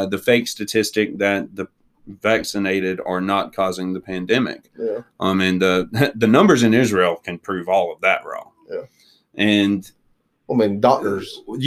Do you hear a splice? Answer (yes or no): no